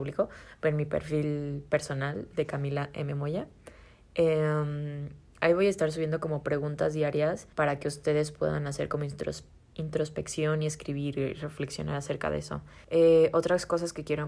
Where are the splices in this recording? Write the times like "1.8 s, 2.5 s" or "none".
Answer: 7.5 s, 12.8 s